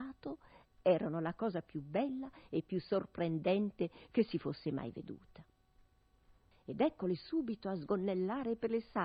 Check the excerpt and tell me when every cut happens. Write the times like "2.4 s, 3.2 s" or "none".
6.5 s